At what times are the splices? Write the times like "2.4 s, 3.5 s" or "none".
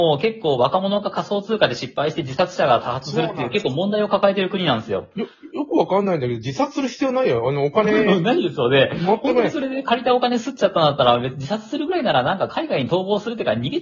none